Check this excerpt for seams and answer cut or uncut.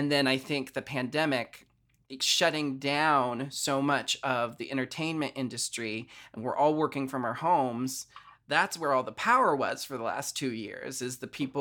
uncut